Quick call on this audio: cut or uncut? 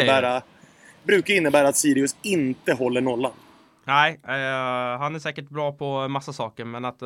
uncut